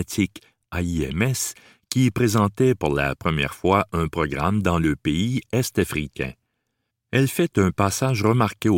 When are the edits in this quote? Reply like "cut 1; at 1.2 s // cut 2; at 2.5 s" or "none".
cut 1; at 6.9 s